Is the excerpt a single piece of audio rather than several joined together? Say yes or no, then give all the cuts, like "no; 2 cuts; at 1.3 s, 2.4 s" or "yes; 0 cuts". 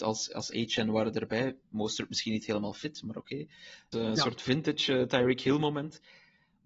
no; 1 cut; at 3.9 s